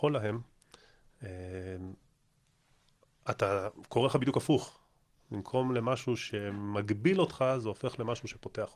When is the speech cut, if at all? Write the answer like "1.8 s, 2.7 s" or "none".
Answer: none